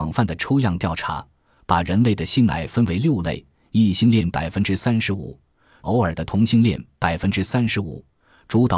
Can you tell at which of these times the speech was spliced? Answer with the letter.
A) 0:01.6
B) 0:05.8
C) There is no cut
B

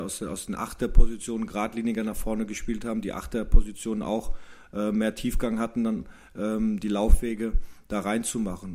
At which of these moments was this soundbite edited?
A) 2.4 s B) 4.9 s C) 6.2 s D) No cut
D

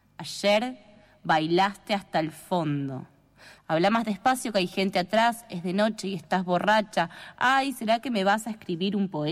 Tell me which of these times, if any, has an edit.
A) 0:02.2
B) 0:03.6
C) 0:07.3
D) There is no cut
B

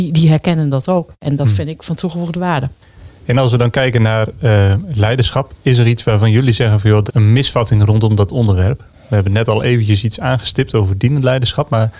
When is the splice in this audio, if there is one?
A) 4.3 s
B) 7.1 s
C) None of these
B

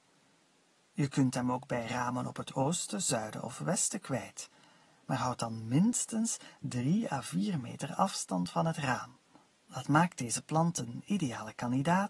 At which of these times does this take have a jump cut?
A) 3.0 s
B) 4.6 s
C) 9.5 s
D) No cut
C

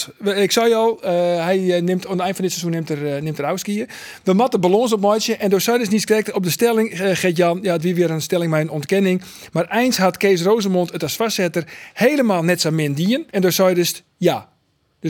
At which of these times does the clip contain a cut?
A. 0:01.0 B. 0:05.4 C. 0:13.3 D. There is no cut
C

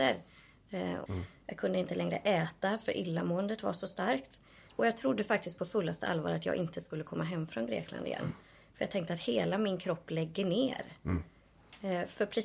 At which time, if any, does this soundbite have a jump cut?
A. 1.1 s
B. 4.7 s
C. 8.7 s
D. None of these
A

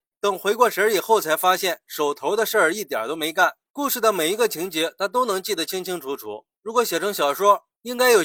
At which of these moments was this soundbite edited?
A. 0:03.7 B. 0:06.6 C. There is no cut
A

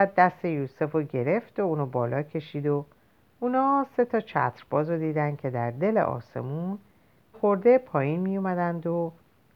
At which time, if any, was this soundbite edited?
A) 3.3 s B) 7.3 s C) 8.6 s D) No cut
B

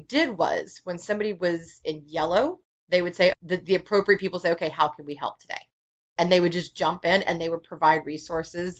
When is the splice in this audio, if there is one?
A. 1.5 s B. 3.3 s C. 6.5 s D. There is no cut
B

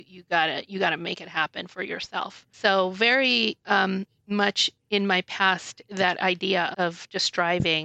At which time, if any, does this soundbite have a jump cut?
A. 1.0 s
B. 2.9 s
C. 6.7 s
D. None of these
C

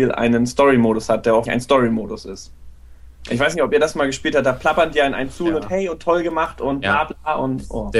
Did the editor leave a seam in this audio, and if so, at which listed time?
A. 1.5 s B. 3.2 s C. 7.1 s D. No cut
A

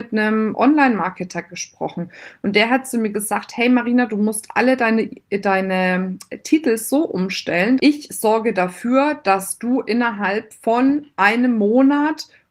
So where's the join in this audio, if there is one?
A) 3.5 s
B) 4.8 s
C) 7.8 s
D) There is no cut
C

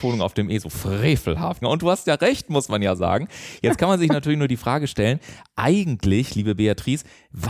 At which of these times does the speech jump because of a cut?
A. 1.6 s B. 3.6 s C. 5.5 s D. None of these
A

